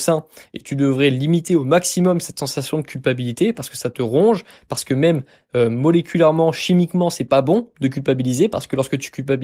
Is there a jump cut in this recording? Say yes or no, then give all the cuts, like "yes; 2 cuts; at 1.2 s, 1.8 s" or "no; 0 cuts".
no; 0 cuts